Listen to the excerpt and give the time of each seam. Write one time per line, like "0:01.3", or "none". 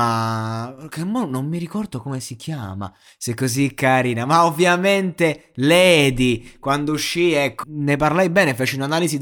0:07.6